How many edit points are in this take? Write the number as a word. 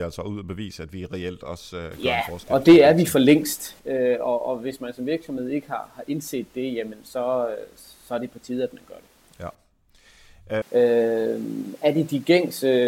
one